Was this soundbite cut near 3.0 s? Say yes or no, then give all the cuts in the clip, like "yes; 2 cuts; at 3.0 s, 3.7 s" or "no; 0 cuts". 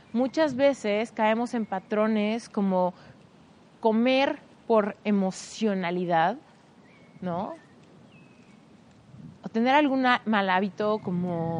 no; 1 cut; at 9.4 s